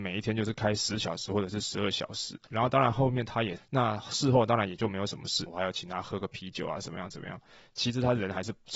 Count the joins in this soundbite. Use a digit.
3